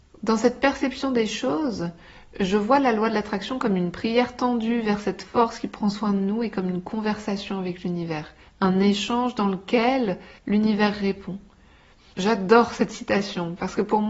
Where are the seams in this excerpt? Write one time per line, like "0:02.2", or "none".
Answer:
0:08.4
0:10.4
0:12.1